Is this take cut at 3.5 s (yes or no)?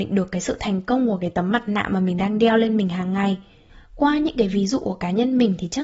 no